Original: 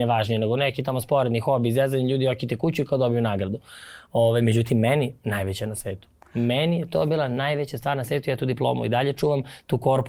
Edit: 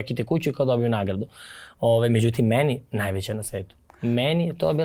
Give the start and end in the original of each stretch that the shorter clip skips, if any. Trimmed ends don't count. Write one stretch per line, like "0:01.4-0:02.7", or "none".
none